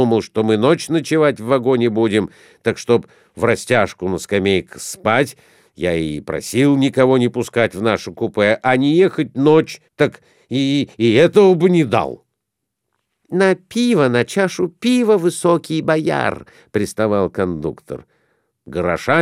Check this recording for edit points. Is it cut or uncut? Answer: cut